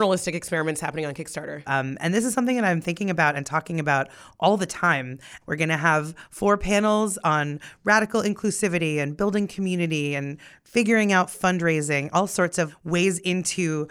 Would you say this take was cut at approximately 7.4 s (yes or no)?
no